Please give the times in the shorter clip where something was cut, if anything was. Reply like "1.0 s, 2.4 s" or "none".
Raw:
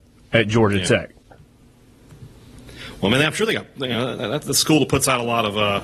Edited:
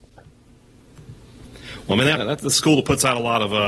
2.1 s